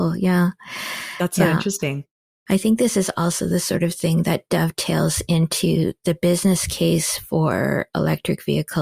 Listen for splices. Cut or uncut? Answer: uncut